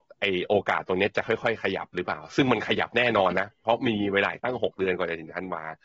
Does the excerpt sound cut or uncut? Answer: uncut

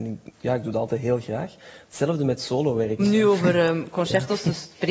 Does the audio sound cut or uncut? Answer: cut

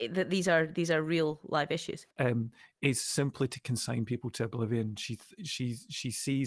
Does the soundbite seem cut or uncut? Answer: cut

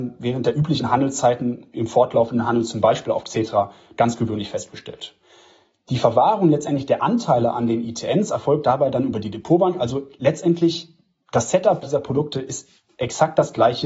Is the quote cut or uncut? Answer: cut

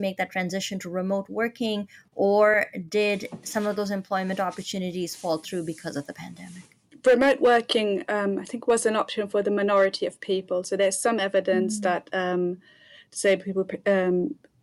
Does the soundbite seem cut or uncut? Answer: uncut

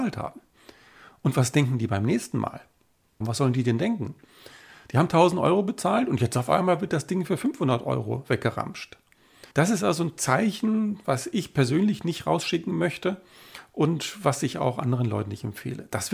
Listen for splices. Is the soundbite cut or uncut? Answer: cut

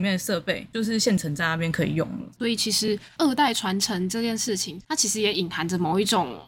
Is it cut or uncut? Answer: uncut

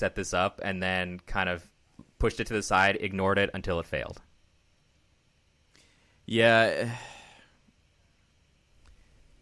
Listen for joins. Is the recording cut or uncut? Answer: uncut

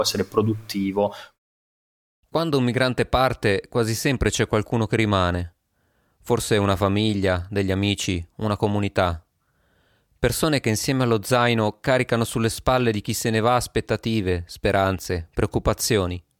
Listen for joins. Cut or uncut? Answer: uncut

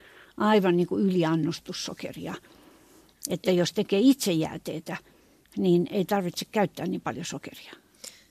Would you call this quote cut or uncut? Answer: uncut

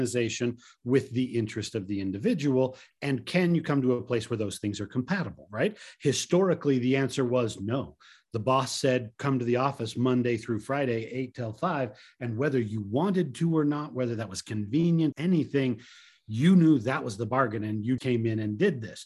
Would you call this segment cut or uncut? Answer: cut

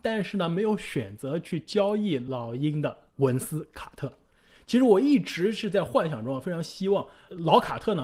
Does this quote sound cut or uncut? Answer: cut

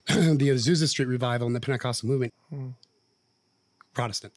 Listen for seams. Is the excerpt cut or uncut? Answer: cut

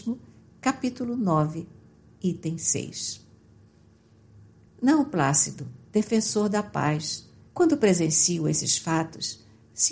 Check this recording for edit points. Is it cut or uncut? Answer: cut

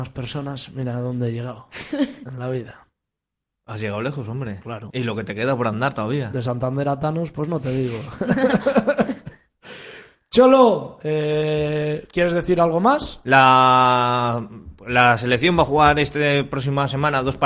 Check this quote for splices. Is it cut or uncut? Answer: uncut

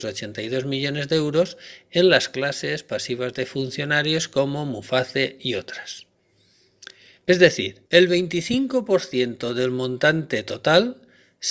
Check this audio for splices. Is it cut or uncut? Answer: cut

